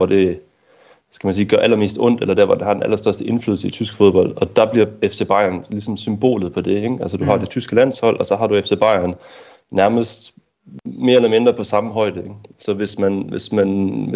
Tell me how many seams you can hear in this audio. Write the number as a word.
zero